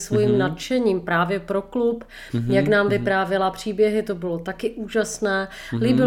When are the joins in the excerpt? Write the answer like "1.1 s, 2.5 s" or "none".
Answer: none